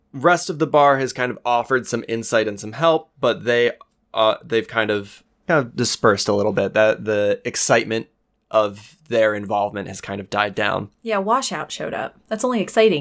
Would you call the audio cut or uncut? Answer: uncut